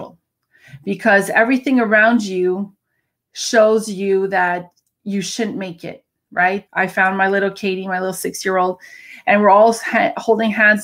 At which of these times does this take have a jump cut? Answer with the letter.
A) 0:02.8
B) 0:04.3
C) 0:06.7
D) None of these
C